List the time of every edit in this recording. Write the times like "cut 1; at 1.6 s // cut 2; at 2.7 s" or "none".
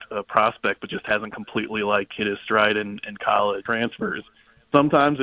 cut 1; at 3.7 s